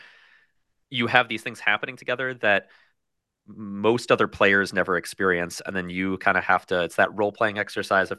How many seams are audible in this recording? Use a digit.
0